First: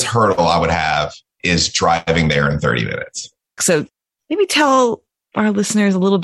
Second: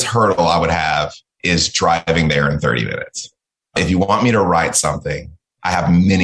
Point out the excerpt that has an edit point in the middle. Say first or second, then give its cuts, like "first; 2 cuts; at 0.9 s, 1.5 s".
first; 1 cut; at 3.6 s